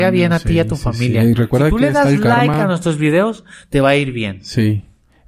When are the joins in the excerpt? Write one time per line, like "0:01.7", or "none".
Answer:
none